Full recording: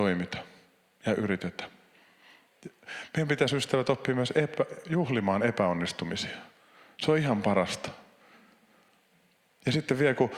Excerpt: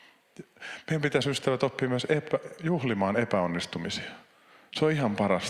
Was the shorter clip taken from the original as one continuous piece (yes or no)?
yes